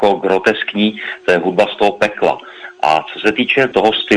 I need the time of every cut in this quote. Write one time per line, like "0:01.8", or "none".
none